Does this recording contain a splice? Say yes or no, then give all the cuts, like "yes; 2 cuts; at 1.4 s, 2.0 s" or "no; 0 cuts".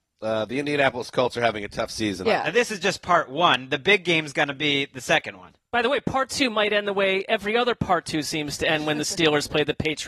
yes; 1 cut; at 2.2 s